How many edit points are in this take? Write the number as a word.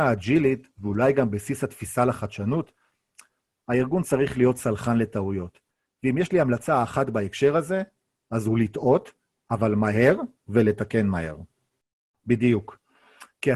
one